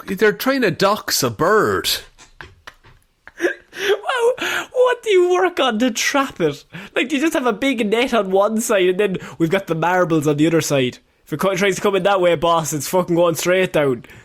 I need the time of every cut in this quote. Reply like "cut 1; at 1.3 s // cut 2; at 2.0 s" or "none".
none